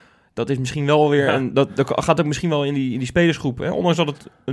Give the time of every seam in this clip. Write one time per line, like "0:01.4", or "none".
none